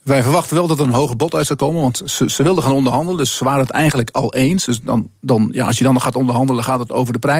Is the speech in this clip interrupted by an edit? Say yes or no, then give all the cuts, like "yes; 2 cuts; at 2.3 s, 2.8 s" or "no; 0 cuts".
yes; 1 cut; at 4.7 s